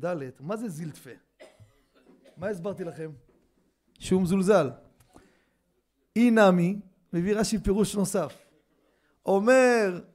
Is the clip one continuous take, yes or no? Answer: yes